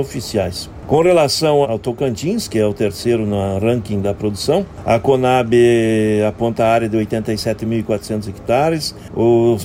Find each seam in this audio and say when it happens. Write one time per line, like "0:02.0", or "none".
0:01.6